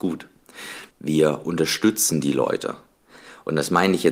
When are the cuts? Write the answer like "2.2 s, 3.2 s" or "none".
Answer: 0.9 s